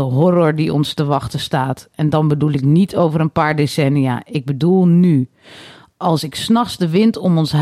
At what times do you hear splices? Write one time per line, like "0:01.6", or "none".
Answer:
none